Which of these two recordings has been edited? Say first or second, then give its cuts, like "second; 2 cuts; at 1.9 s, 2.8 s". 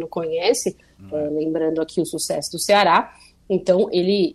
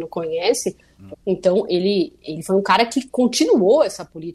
second; 1 cut; at 1.1 s